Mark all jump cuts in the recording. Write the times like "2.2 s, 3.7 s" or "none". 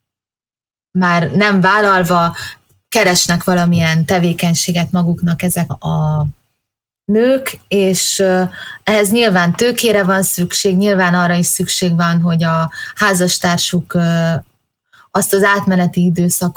5.7 s